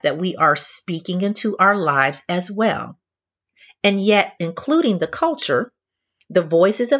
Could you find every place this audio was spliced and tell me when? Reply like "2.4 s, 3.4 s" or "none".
4.4 s